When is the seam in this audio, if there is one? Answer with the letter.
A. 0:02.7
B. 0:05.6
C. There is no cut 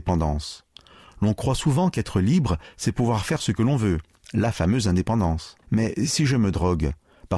B